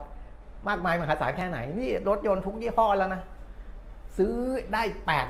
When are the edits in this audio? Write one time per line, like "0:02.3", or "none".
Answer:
none